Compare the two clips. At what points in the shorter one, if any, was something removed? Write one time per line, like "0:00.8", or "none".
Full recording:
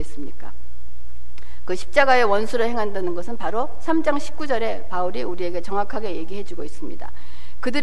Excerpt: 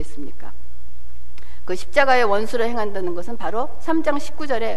none